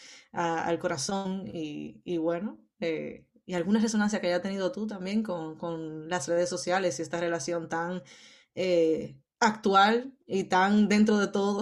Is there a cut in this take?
no; 0 cuts

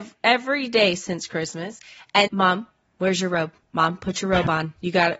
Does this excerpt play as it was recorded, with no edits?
no; 1 cut; at 2.3 s

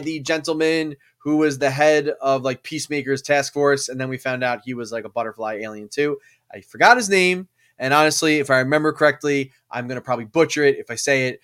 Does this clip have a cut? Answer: no; 0 cuts

